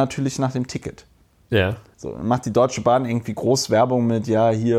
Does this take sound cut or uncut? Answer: cut